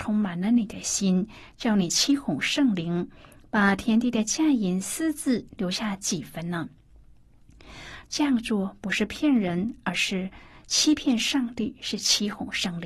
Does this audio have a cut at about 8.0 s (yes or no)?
yes